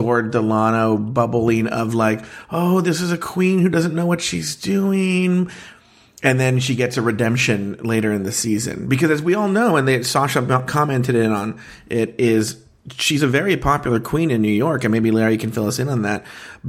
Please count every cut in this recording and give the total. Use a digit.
0